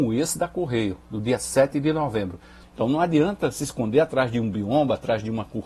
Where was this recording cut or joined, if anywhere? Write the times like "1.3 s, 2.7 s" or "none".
2.6 s